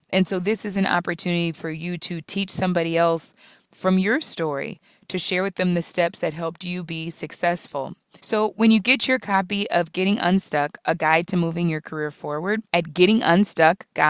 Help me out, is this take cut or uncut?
cut